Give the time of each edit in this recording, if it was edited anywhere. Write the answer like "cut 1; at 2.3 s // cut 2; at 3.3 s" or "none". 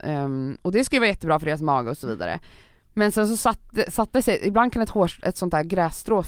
none